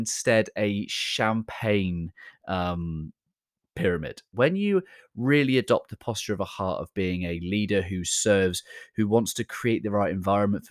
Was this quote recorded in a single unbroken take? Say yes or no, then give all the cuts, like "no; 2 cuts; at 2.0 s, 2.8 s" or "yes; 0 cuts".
no; 1 cut; at 4.3 s